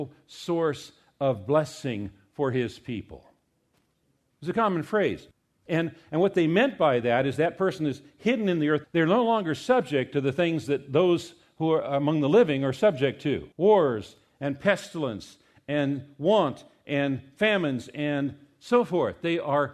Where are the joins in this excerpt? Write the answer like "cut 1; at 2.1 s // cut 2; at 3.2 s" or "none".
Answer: cut 1; at 4.3 s // cut 2; at 8.8 s // cut 3; at 13.5 s